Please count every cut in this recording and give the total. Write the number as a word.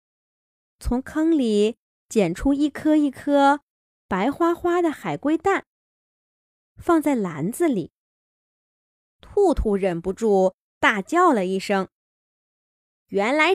zero